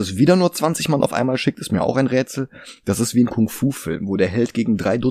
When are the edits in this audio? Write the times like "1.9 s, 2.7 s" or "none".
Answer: none